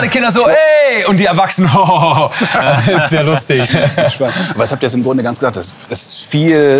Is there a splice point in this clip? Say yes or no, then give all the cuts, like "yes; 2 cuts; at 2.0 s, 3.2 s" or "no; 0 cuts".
no; 0 cuts